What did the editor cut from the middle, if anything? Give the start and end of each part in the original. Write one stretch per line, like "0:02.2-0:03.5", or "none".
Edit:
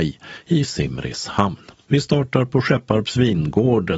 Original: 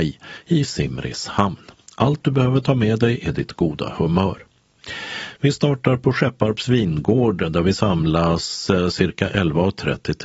0:01.9-0:05.4

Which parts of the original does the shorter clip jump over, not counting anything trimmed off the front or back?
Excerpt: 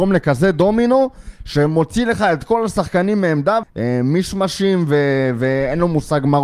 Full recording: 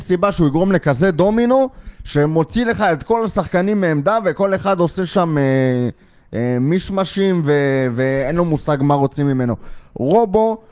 0:04.2-0:06.2

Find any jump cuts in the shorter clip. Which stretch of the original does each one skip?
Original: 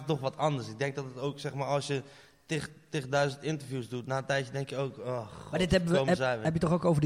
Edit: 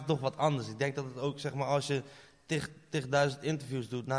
none

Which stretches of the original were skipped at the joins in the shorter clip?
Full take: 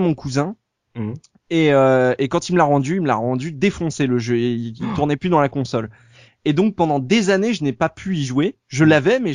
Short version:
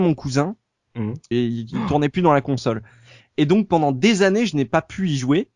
0:01.3-0:04.4

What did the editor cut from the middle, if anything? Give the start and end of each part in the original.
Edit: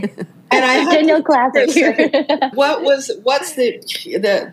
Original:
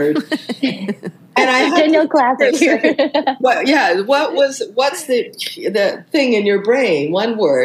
0:03.4-0:04.0

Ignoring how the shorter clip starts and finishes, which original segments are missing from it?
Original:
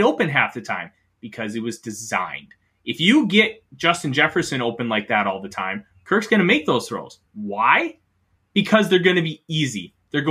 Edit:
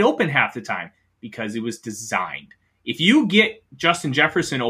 none

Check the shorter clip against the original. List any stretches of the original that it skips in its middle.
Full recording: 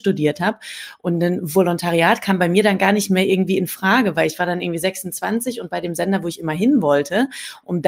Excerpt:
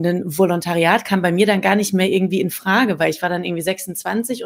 none

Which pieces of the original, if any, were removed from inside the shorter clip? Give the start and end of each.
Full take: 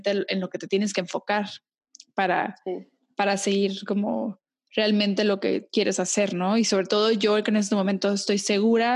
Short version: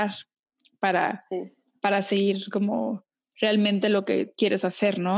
none

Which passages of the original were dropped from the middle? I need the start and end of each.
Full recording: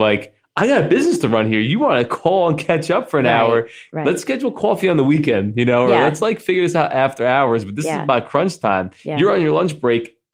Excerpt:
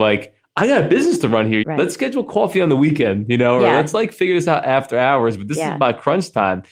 0:01.6-0:03.9

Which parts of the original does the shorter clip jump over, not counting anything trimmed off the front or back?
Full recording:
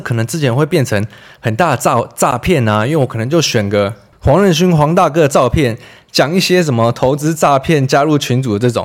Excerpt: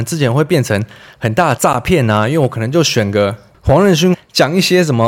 0:01.8-0:02.1
0:04.7-0:05.9

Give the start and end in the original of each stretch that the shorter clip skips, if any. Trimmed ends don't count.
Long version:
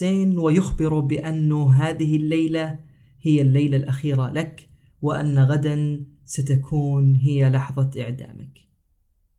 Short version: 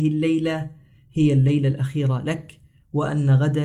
none

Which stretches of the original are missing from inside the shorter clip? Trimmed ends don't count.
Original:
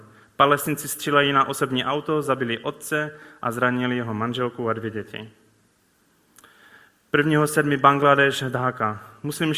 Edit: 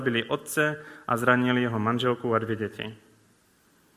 none

